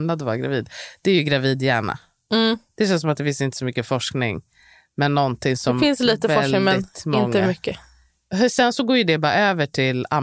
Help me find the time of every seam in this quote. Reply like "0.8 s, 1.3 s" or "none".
none